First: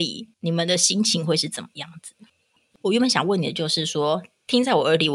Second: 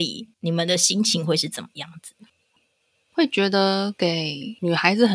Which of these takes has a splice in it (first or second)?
first